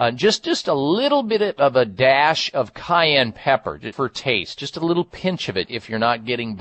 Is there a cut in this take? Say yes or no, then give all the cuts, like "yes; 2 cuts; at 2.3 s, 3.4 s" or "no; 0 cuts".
yes; 2 cuts; at 3.9 s, 5.6 s